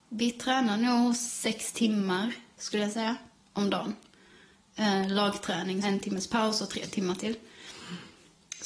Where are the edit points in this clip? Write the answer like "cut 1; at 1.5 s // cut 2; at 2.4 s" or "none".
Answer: cut 1; at 5.8 s